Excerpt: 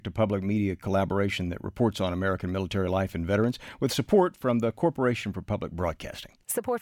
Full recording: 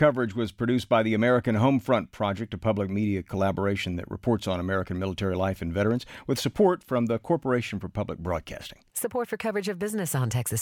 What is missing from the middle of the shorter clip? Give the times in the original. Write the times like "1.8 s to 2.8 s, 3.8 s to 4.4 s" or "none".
none